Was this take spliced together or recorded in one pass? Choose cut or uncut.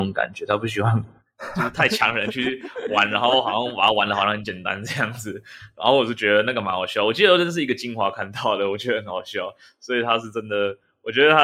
uncut